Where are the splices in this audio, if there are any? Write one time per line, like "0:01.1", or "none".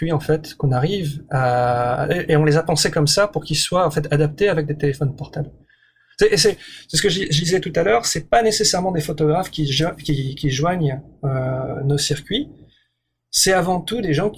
none